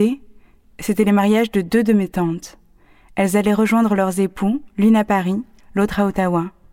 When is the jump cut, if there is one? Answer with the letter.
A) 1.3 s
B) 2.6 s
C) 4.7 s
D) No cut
D